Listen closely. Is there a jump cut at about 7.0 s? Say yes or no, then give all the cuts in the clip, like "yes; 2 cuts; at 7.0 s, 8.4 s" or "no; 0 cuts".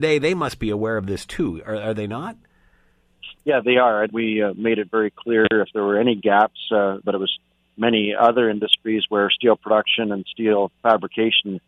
yes; 2 cuts; at 4.1 s, 7.0 s